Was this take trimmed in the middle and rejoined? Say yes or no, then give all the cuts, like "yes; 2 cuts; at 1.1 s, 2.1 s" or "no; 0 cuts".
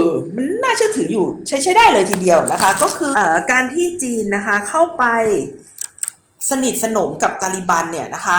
yes; 1 cut; at 3.1 s